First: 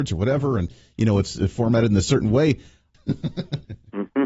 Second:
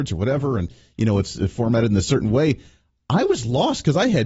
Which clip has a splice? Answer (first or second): first